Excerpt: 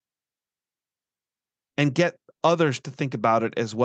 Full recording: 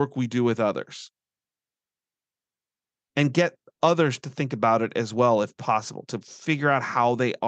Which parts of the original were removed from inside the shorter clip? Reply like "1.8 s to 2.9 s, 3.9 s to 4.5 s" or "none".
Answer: none